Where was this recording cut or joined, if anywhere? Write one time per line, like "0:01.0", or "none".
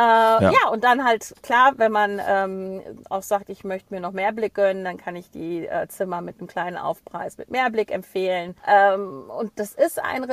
0:08.6